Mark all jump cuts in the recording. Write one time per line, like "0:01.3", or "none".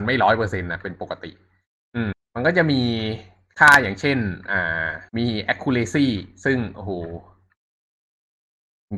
0:02.1
0:05.1